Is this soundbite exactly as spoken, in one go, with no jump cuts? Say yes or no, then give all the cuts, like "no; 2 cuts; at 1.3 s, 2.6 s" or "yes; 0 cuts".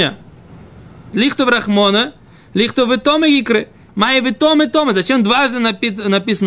no; 2 cuts; at 1.1 s, 3.9 s